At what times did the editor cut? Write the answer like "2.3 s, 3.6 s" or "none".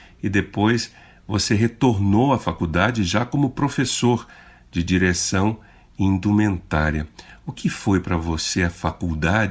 7.5 s